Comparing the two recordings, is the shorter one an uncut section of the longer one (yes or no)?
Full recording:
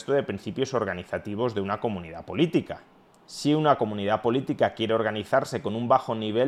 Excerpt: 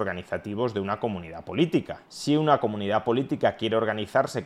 no